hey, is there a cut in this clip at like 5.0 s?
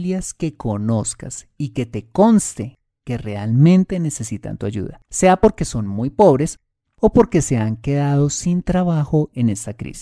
yes; 1 cut; at 5.0 s

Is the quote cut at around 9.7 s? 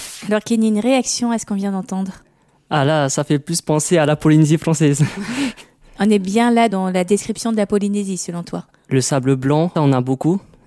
yes; 1 cut; at 9.7 s

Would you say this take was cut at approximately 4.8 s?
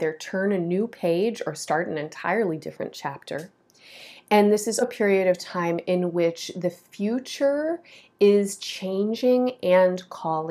yes; 1 cut; at 4.8 s

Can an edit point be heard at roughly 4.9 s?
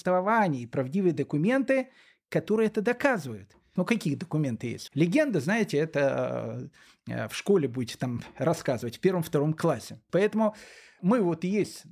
yes; 3 cuts; at 3.8 s, 4.9 s, 10.1 s

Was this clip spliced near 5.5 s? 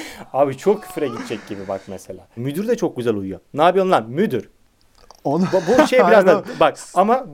no; 1 cut; at 2.4 s

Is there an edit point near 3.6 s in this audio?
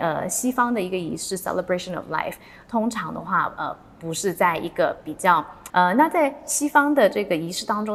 no; 1 cut; at 5.7 s

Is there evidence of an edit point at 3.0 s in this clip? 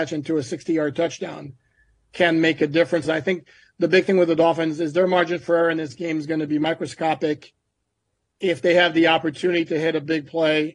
yes; 1 cut; at 3.0 s

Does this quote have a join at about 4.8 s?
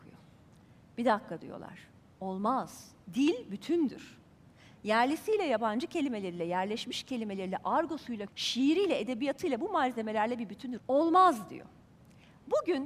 no; 2 cuts; at 8.3 s, 10.8 s

